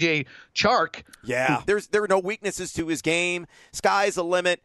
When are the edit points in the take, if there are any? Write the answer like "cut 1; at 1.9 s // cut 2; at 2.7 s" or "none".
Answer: cut 1; at 1.6 s